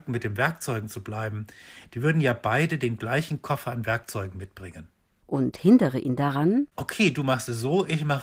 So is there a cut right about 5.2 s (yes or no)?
yes